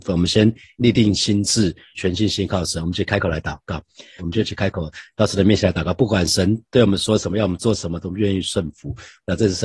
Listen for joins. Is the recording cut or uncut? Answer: cut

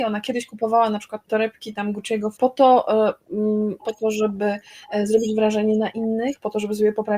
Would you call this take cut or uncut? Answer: cut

